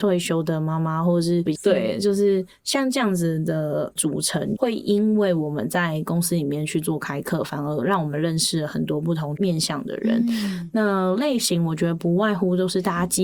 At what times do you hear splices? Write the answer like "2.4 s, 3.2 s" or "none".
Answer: 1.6 s